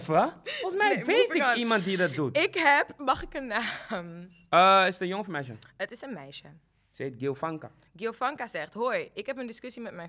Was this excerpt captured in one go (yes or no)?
yes